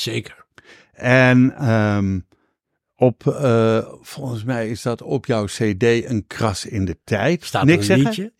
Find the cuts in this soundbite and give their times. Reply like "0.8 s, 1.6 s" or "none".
none